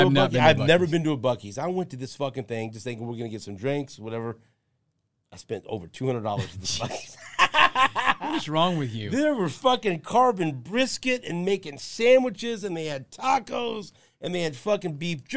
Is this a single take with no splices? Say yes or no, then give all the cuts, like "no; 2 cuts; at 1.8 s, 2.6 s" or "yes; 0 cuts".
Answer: yes; 0 cuts